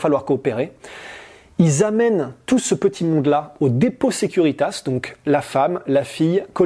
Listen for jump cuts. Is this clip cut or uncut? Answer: uncut